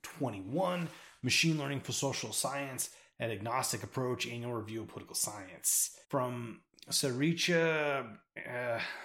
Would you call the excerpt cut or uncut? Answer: cut